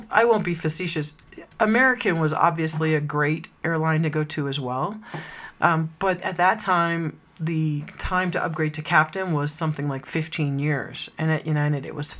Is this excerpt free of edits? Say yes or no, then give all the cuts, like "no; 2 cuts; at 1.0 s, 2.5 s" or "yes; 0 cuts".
yes; 0 cuts